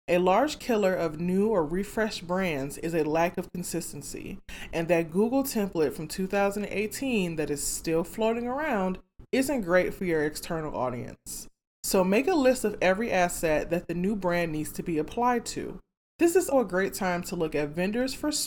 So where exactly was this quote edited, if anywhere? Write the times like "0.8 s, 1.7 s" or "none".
16.5 s